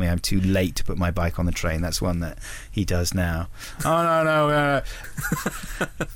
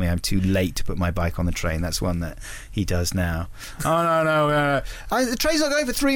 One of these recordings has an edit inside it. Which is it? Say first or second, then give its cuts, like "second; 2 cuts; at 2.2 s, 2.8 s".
first; 1 cut; at 5.0 s